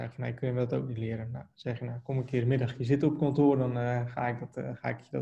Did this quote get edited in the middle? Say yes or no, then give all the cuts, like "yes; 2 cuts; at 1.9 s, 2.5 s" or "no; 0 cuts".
no; 0 cuts